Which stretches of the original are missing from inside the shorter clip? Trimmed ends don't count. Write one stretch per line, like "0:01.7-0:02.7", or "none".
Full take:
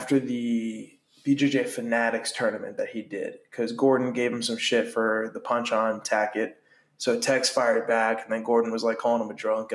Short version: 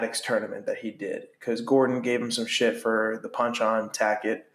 none